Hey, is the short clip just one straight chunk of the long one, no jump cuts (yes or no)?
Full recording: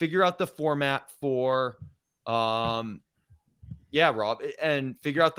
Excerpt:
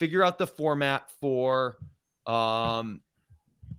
yes